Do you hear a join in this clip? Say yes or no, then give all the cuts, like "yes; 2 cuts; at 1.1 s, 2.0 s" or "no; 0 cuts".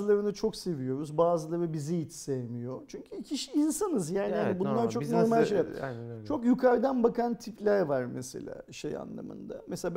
no; 0 cuts